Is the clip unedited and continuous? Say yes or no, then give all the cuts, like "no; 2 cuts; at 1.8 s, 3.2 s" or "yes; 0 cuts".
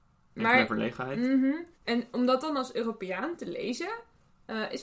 no; 1 cut; at 1.7 s